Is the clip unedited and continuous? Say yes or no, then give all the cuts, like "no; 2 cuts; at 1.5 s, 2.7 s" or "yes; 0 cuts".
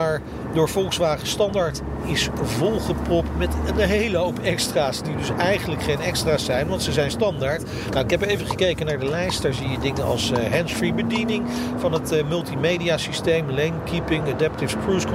yes; 0 cuts